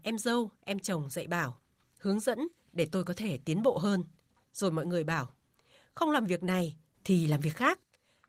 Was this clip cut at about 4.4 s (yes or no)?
yes